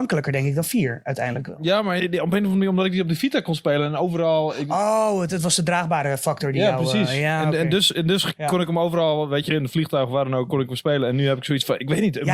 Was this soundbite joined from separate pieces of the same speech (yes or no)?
no